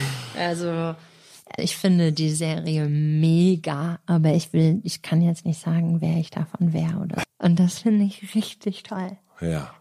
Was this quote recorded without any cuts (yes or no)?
no